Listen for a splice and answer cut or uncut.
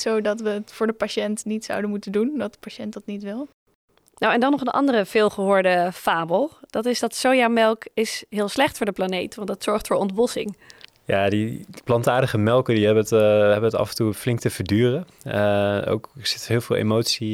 uncut